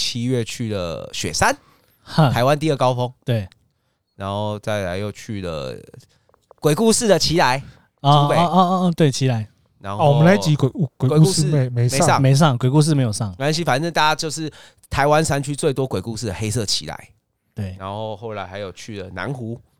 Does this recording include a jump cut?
no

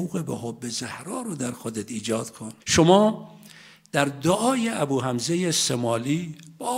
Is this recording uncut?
no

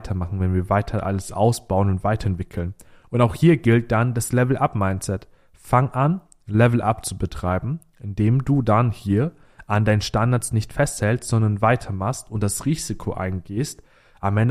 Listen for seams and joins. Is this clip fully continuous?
yes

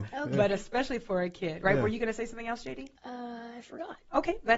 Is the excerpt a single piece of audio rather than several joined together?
no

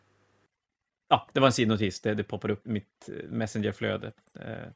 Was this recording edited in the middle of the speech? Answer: yes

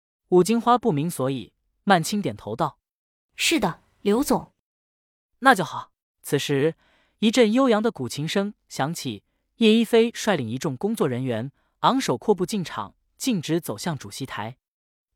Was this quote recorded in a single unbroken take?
no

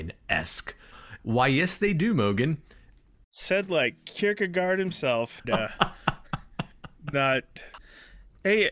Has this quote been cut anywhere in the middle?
yes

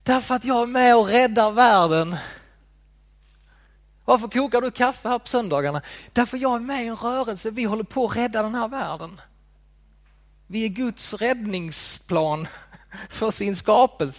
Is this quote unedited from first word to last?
yes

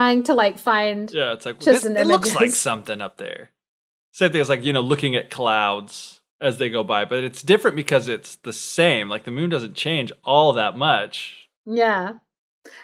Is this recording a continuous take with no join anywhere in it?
no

